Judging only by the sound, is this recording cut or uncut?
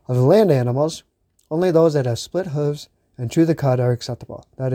uncut